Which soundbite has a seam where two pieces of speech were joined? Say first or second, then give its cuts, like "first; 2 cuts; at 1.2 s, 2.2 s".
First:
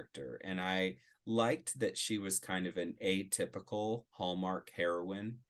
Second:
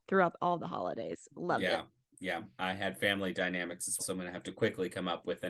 second; 1 cut; at 4.0 s